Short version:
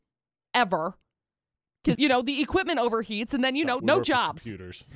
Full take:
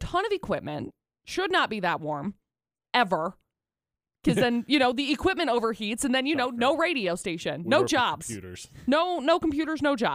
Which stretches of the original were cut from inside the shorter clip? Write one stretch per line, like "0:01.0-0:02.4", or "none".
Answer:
0:04.3-0:04.7
0:06.5-0:07.6